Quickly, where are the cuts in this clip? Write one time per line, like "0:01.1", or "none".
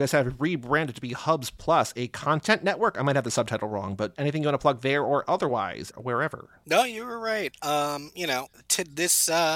0:05.9